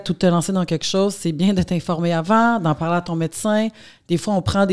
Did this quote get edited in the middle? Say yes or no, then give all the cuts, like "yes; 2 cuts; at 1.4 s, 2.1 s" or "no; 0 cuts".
no; 0 cuts